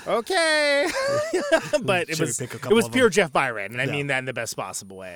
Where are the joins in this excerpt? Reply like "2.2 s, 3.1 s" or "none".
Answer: none